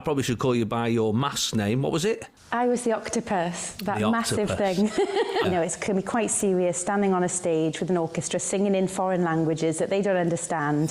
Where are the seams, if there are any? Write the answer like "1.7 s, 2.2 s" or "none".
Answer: 5.4 s